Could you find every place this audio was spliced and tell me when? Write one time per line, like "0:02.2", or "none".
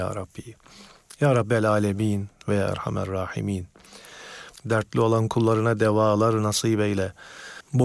0:04.5